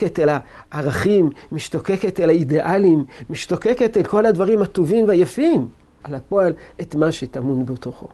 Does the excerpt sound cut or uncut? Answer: cut